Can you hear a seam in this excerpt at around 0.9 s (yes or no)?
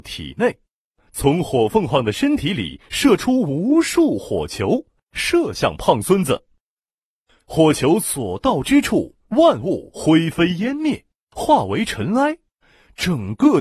yes